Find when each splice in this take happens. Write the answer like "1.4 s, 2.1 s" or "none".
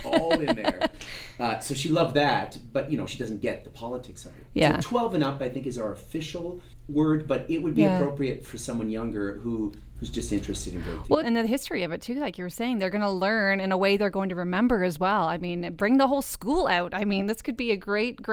8.5 s, 11.2 s, 15.8 s